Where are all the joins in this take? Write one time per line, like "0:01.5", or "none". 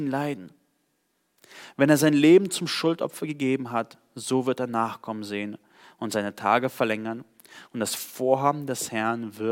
none